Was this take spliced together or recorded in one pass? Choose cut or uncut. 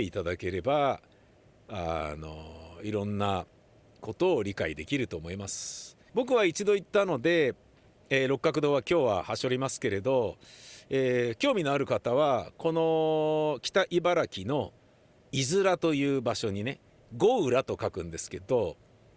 cut